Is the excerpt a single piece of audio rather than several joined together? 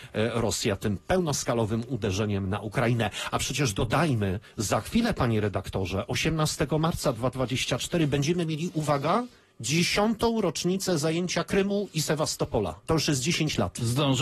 no; 1 cut; at 12.8 s

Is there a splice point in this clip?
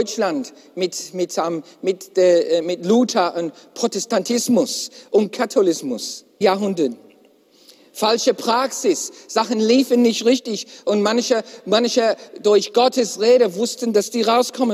yes; 2 cuts; at 6.4 s, 12.4 s

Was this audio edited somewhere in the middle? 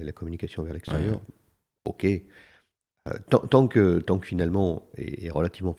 no; 0 cuts

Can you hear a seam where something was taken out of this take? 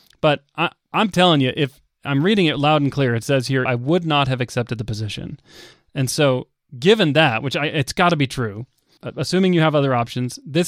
yes; 2 cuts; at 3.6 s, 5.7 s

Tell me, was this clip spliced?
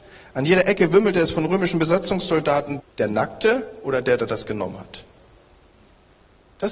yes; 1 cut; at 2.8 s

